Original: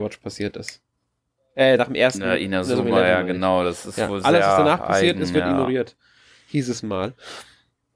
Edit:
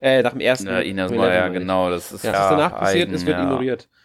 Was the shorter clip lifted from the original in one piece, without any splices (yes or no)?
no